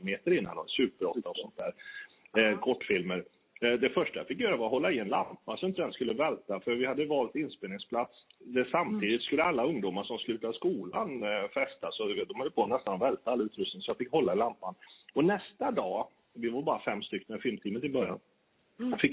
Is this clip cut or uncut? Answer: uncut